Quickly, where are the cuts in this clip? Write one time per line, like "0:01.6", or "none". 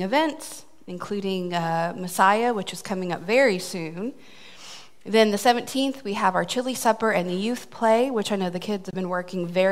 none